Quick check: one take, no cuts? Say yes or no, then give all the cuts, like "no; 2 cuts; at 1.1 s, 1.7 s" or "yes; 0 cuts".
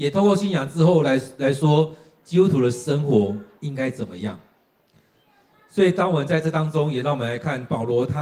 yes; 0 cuts